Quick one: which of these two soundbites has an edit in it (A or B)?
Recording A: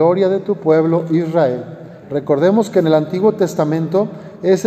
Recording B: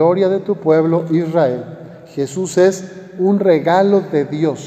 A